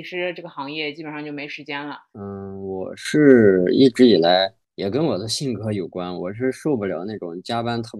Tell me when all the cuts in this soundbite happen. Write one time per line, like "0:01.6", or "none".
0:02.1

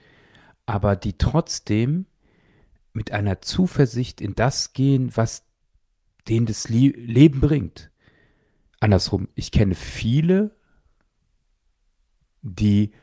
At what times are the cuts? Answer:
0:08.7

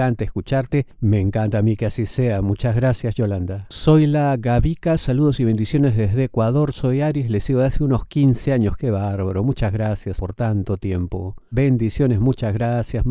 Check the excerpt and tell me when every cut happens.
0:10.2
0:11.5

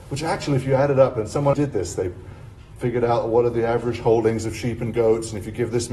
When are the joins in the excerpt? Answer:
0:01.5

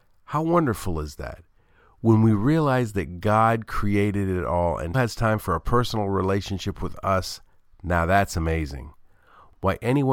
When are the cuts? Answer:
0:04.9

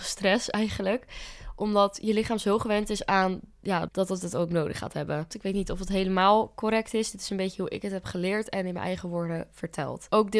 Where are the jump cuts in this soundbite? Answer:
0:03.9
0:05.3

